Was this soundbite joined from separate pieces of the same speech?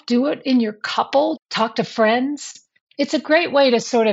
yes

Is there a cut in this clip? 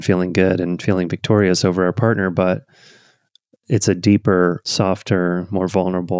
yes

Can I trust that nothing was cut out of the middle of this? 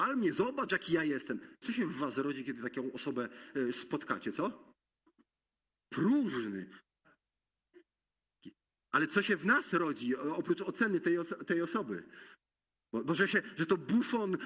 no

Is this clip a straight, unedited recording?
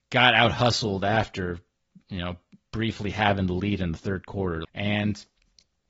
no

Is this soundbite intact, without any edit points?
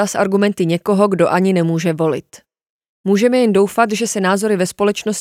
yes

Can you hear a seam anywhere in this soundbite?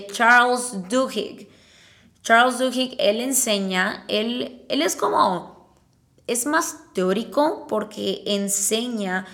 no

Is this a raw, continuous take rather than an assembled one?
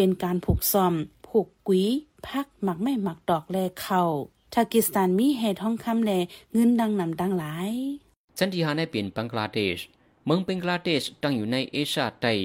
yes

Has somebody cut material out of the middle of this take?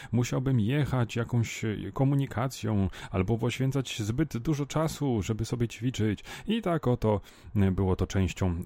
no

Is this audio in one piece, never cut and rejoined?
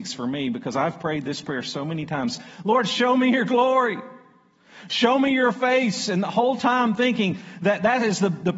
yes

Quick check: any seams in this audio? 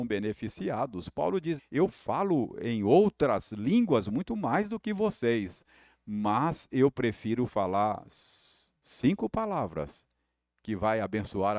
yes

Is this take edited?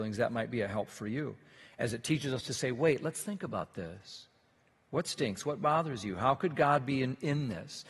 no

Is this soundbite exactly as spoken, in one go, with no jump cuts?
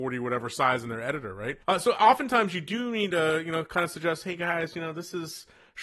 no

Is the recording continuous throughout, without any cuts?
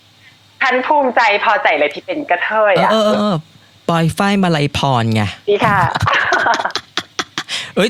no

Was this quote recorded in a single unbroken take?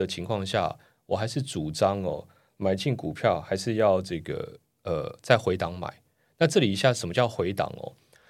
yes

